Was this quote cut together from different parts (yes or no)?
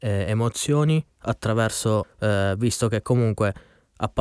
yes